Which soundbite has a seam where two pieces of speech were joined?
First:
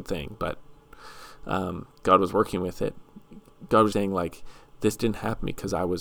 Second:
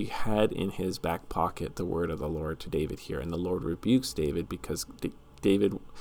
first; 1 cut; at 3.9 s

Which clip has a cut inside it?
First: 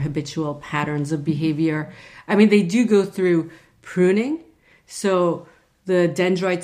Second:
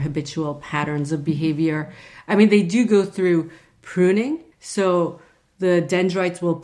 second; 1 cut; at 4.5 s

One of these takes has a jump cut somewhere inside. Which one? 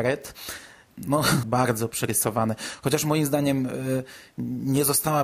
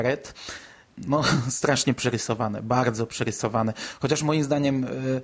first; 1 cut; at 1.4 s

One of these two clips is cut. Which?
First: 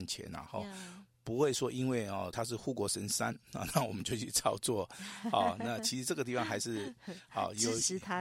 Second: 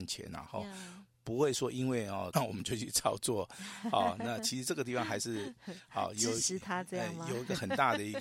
second; 1 cut; at 2.3 s

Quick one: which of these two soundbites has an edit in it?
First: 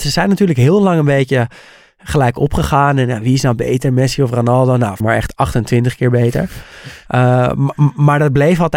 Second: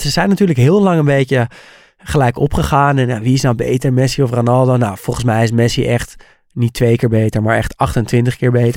first; 1 cut; at 5.0 s

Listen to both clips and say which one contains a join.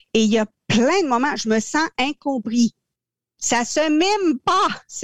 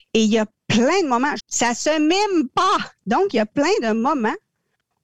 second; 2 cuts; at 1.4 s, 3.0 s

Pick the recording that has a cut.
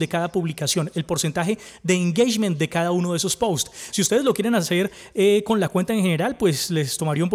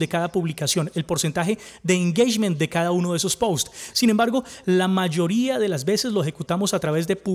second; 1 cut; at 3.9 s

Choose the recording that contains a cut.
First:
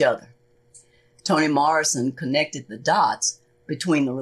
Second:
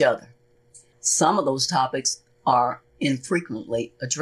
second; 1 cut; at 0.9 s

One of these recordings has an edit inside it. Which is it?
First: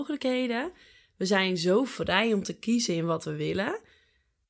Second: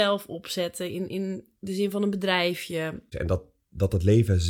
second; 1 cut; at 3.1 s

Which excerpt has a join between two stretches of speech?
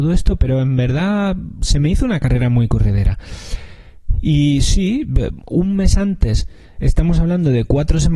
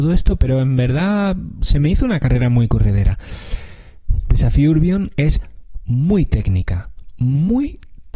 second; 1 cut; at 4.2 s

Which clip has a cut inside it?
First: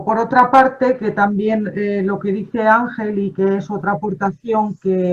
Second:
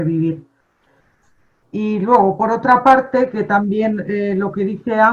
second; 1 cut; at 1.6 s

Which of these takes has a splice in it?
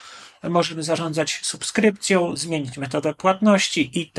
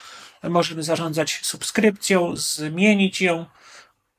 first; 1 cut; at 2.4 s

